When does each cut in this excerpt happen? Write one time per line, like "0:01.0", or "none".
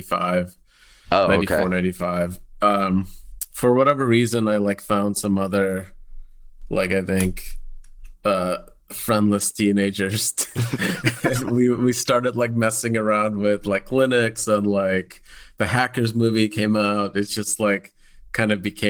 none